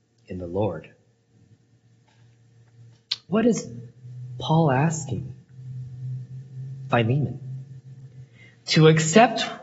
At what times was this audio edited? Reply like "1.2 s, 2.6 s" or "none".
3.3 s